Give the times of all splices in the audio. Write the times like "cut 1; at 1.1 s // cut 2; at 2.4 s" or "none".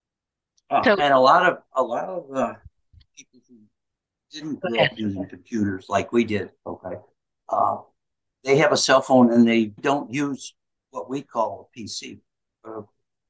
cut 1; at 7.4 s // cut 2; at 9.8 s